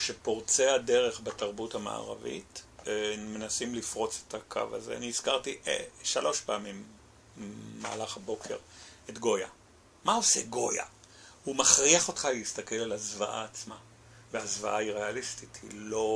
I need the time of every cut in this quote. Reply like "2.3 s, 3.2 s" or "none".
none